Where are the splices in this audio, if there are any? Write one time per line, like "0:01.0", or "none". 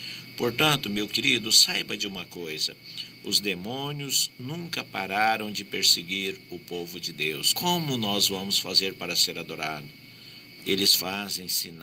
0:07.5
0:10.6

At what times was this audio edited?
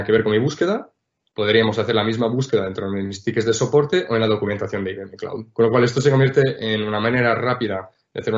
none

